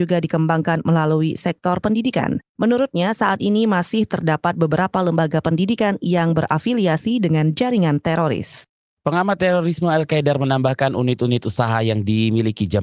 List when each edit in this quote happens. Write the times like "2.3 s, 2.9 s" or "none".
2.5 s, 8.9 s